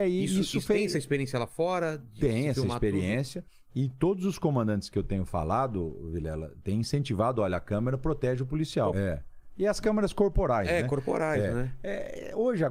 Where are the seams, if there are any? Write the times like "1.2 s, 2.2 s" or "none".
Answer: 8.9 s

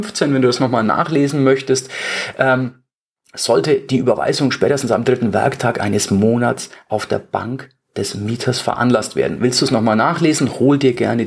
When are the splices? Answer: 9.3 s

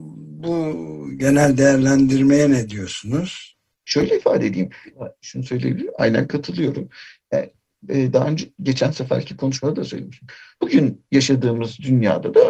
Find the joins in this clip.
3.8 s, 4.9 s, 10.5 s

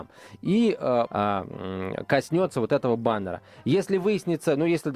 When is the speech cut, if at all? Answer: 1.1 s

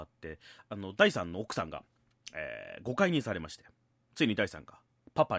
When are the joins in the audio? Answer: none

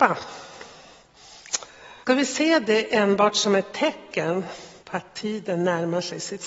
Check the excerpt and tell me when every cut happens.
2.0 s, 4.8 s

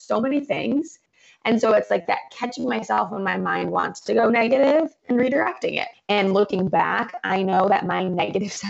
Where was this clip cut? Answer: 5.9 s

